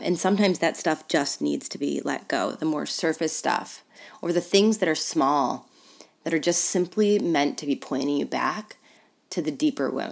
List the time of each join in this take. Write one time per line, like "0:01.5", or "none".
none